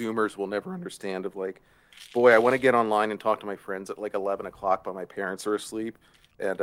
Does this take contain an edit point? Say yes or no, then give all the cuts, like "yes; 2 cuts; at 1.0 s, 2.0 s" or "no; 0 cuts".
no; 0 cuts